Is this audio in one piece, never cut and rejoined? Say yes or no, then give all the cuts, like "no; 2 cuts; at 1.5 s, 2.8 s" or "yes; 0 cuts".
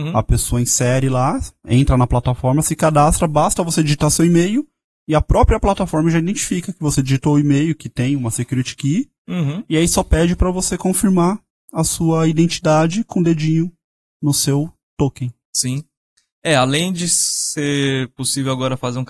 yes; 0 cuts